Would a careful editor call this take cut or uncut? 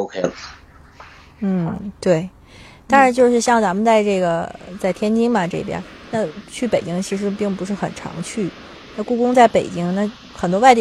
uncut